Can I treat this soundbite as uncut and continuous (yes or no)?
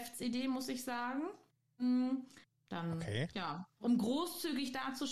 no